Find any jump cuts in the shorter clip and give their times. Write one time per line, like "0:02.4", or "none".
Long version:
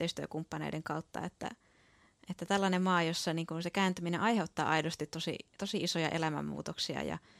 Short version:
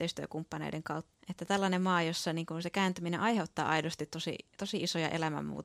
0:01.1